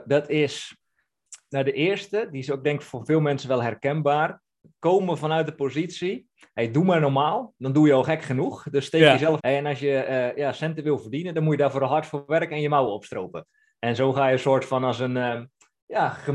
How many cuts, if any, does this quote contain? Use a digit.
1